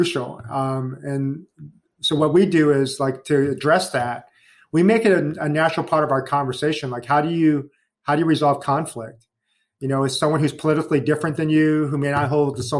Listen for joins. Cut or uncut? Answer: uncut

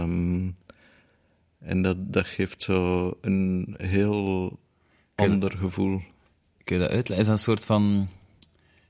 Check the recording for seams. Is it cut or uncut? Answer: uncut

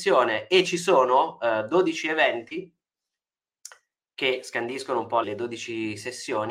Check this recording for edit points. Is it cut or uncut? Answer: cut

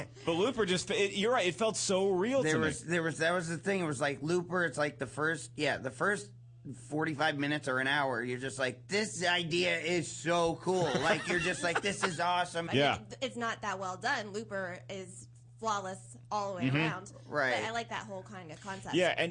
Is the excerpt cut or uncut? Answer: cut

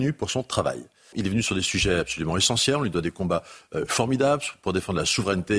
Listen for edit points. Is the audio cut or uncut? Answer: cut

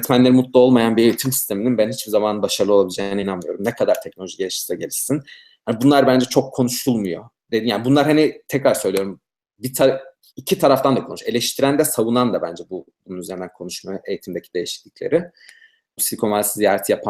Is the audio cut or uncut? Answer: cut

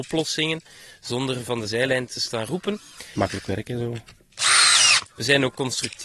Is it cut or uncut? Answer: cut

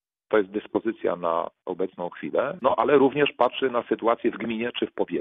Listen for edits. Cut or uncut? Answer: cut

